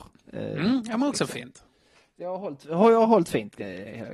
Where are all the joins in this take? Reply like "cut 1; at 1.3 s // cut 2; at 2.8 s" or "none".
none